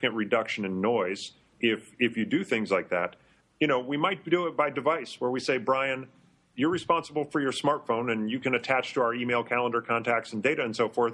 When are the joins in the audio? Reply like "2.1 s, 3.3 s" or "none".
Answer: 1.5 s, 3.4 s

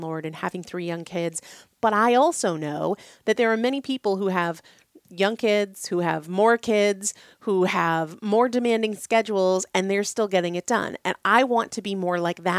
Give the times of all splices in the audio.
none

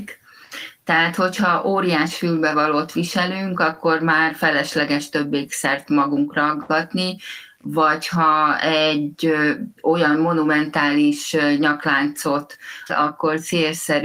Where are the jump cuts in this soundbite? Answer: 9.8 s, 12.9 s

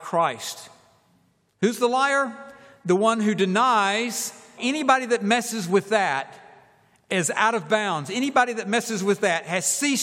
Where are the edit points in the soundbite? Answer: 4.6 s

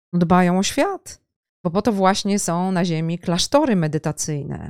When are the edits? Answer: none

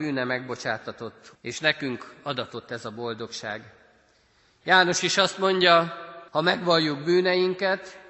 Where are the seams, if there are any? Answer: 1.4 s, 6.3 s

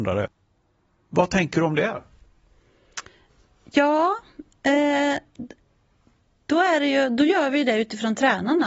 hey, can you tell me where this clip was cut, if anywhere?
none

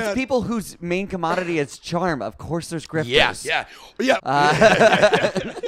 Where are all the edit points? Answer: 4.2 s

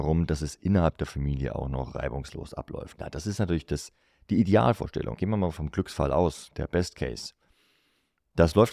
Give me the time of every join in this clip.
5.1 s, 6.5 s

